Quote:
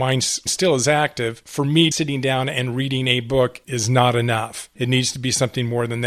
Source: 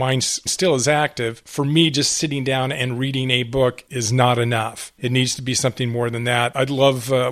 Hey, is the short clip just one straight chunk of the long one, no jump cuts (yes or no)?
no